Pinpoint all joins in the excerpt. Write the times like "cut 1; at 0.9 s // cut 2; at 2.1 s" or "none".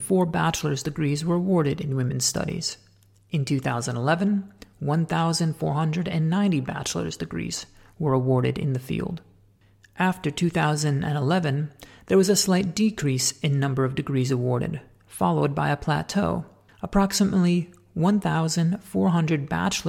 cut 1; at 16.7 s